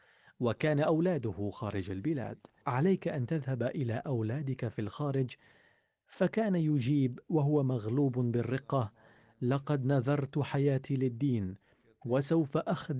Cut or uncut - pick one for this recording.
cut